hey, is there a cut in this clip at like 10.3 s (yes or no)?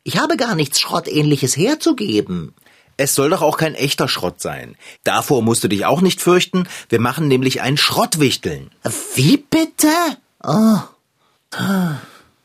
no